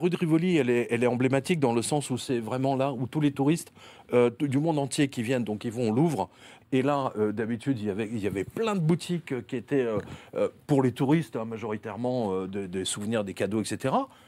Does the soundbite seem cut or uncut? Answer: cut